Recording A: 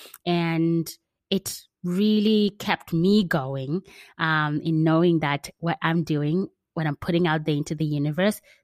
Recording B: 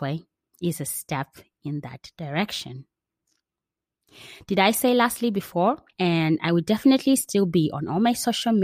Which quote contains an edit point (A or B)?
B